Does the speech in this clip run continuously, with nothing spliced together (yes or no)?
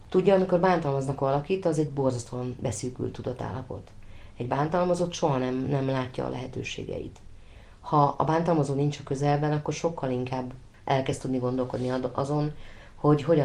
yes